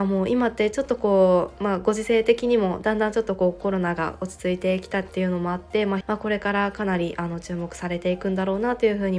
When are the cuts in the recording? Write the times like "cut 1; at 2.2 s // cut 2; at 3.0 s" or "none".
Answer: cut 1; at 6.0 s